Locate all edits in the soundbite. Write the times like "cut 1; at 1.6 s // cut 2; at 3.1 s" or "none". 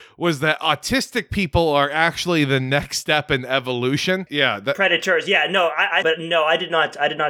cut 1; at 4.3 s // cut 2; at 6.0 s